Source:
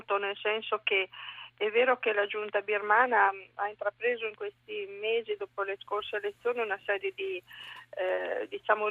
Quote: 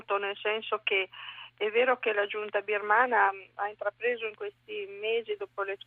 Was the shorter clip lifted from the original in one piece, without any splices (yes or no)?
yes